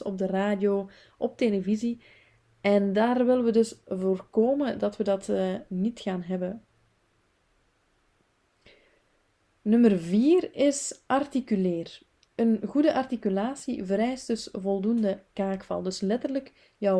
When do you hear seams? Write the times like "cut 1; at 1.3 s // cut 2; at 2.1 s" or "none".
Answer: none